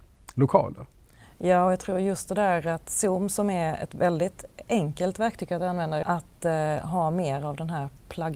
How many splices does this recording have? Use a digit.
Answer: 1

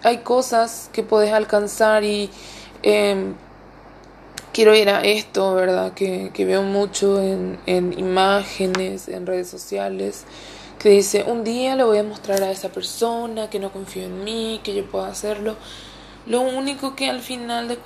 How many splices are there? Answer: 1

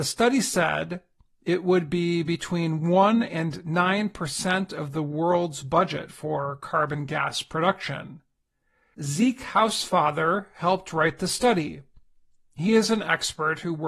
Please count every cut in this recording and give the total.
1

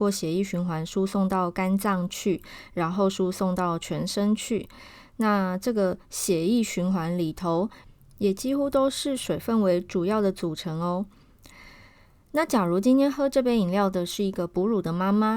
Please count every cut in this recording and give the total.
0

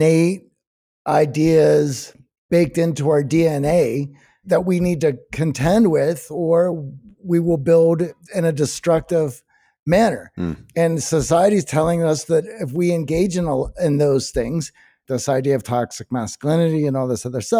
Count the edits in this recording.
1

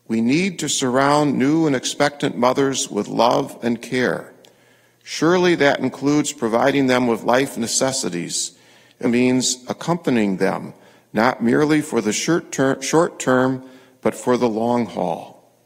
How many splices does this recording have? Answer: 1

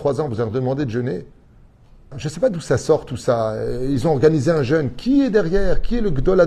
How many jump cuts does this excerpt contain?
1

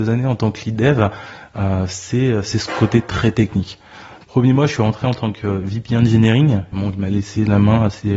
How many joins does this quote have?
2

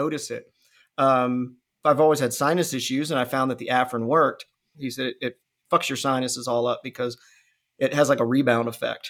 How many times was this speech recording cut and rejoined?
1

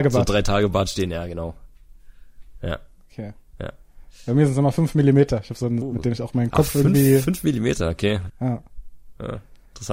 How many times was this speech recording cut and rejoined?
2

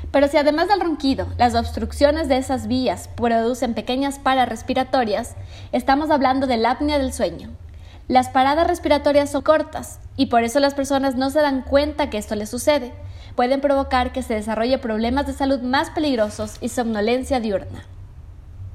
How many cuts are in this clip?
2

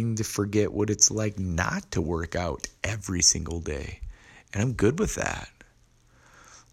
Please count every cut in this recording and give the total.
0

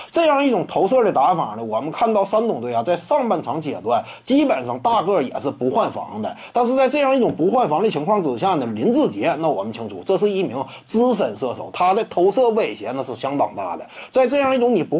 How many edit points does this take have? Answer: 0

